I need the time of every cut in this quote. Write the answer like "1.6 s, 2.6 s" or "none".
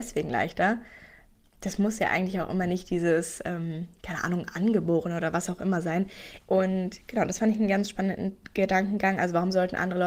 6.4 s